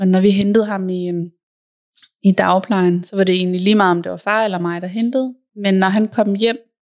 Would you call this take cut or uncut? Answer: uncut